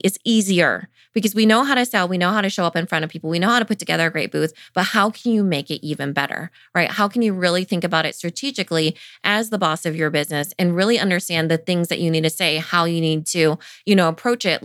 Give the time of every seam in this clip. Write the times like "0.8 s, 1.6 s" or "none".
none